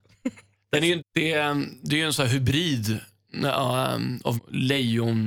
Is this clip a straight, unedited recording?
no; 2 cuts; at 1.0 s, 4.4 s

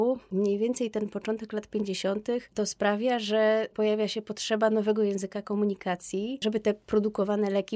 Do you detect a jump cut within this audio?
yes; 1 cut; at 2.5 s

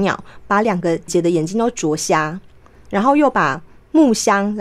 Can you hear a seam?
yes; 1 cut; at 1.1 s

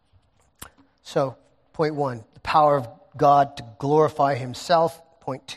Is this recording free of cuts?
yes; 0 cuts

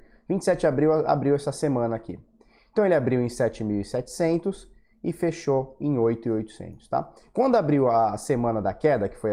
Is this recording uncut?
yes; 0 cuts

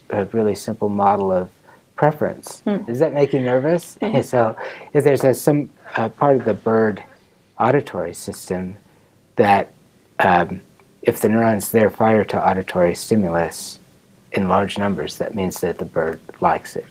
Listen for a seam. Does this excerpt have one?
yes; 2 cuts; at 2.9 s, 4.0 s

